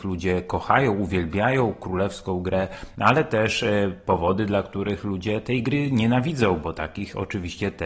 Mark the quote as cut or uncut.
uncut